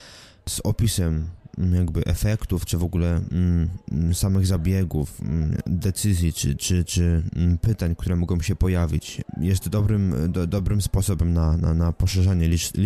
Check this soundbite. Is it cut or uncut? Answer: uncut